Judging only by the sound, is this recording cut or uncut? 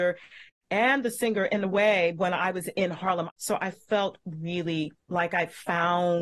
cut